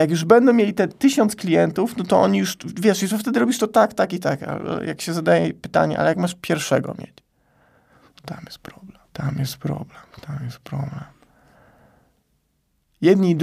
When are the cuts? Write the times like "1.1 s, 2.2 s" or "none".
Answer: 9.1 s